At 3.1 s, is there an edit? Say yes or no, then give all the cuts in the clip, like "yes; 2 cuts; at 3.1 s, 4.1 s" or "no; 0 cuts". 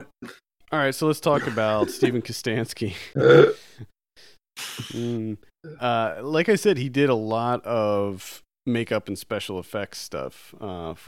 yes; 1 cut; at 3.1 s